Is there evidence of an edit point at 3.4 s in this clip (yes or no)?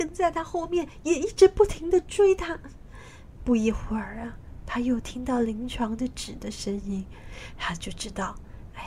yes